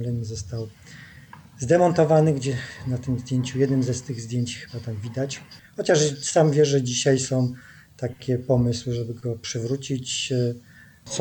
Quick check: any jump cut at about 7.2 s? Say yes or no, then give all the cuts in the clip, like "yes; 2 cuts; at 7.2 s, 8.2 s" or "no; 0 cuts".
no; 1 cut; at 5.6 s